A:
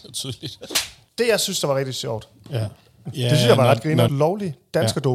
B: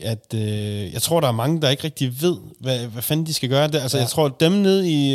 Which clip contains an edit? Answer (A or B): A